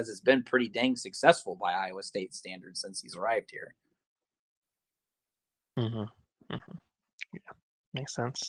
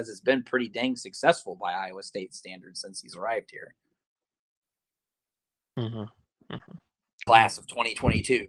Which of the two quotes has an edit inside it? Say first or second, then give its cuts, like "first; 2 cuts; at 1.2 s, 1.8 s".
second; 1 cut; at 7.3 s